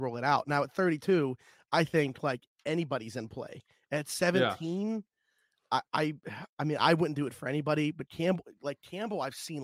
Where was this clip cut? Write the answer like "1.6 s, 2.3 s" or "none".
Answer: none